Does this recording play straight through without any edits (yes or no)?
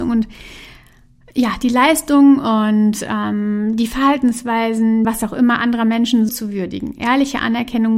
no